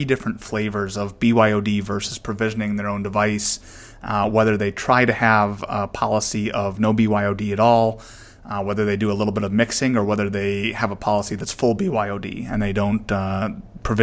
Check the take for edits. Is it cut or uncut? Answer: uncut